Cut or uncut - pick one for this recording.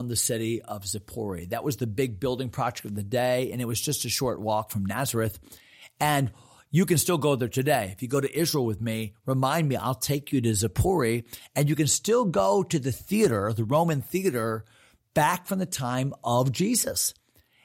uncut